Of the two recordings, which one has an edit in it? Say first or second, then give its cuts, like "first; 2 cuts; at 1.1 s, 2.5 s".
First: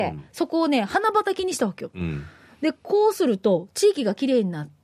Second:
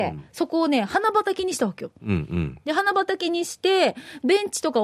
first; 1 cut; at 1.9 s